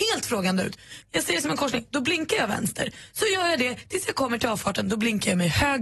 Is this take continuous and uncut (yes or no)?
no